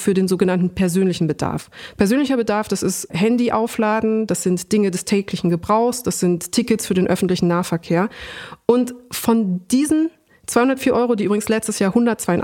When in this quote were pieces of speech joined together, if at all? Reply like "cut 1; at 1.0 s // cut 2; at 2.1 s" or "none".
none